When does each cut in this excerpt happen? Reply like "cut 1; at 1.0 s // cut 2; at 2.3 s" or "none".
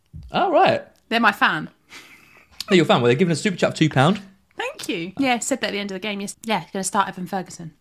cut 1; at 5.2 s // cut 2; at 6.3 s